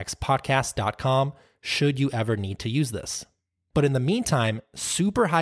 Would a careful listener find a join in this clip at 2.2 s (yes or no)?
no